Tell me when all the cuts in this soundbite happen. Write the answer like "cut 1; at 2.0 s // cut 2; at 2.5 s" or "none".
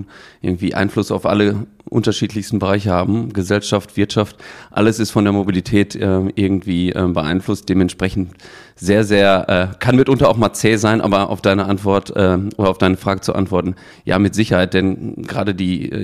none